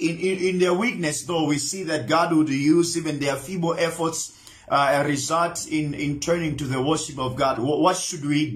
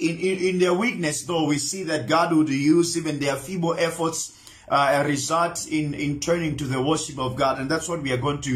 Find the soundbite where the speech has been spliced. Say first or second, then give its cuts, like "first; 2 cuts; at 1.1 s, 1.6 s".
first; 1 cut; at 7.6 s